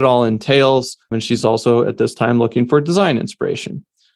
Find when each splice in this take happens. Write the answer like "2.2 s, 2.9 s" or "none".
none